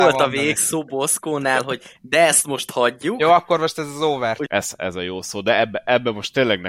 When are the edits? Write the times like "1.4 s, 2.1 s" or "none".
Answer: 4.5 s